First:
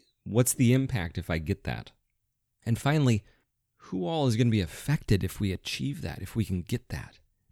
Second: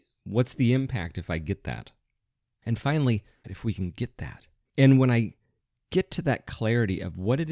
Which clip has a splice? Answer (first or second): second